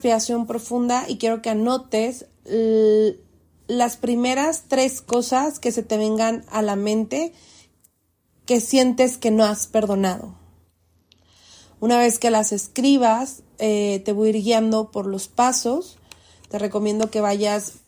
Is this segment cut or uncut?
uncut